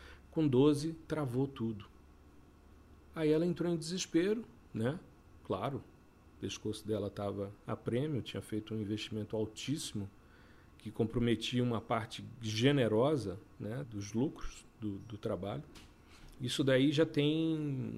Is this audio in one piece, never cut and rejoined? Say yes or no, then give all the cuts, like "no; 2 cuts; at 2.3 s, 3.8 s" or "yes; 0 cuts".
no; 2 cuts; at 13.8 s, 16.4 s